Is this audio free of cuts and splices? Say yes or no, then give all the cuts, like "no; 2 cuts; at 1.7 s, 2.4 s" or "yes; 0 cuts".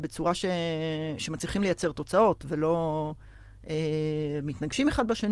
yes; 0 cuts